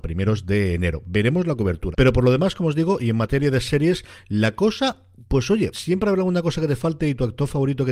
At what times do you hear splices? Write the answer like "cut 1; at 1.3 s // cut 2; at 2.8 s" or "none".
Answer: cut 1; at 1.9 s // cut 2; at 5.7 s